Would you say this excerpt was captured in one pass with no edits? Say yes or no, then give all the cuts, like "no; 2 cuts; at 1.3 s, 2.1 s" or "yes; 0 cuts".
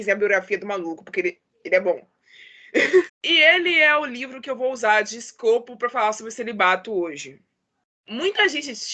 no; 1 cut; at 3.1 s